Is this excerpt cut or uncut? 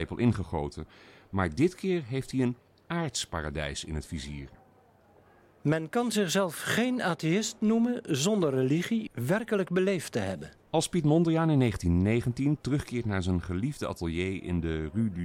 cut